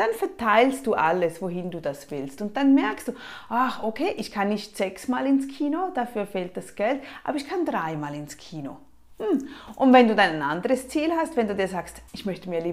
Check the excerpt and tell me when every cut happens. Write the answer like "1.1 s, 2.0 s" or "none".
none